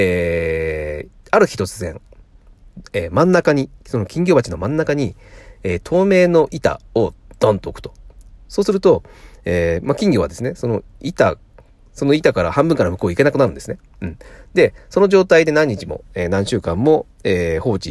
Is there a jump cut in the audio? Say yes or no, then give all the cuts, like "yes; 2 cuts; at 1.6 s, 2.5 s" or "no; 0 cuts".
no; 0 cuts